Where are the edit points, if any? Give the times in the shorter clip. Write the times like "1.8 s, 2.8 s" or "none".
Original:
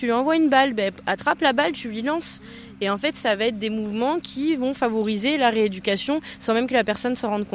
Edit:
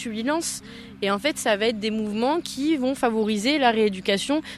none